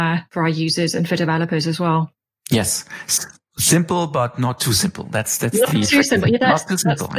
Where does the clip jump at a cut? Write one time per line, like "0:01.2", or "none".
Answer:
none